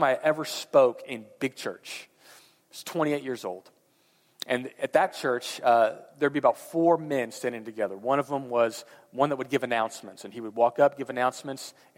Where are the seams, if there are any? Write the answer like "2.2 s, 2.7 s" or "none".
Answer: 6.1 s